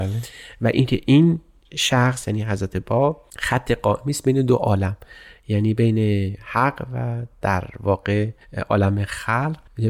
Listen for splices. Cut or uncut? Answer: cut